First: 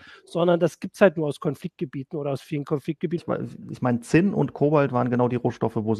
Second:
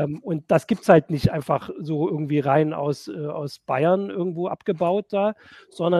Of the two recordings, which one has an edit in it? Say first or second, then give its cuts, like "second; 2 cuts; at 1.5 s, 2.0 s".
first; 1 cut; at 3.2 s